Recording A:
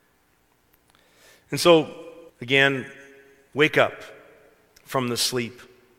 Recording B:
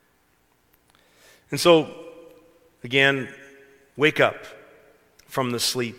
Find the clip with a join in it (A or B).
A